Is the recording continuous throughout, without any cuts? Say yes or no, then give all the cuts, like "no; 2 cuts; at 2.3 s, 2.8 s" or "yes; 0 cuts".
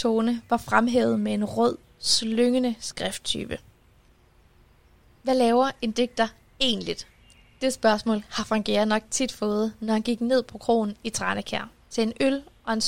yes; 0 cuts